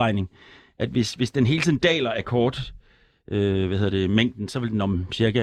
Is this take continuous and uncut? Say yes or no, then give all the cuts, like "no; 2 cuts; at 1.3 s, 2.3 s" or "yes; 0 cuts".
yes; 0 cuts